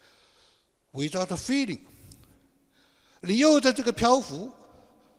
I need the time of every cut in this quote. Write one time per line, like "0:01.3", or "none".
none

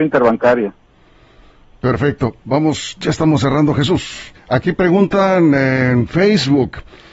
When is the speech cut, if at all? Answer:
0:04.4

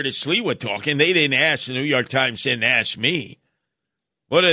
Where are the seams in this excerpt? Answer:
none

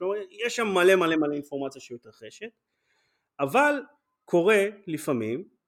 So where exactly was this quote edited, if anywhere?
none

